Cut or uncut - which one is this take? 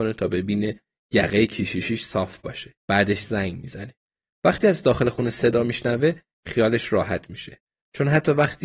cut